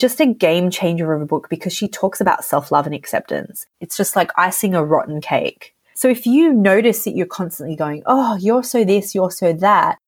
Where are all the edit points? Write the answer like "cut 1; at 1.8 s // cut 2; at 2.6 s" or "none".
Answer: cut 1; at 3.7 s // cut 2; at 5.8 s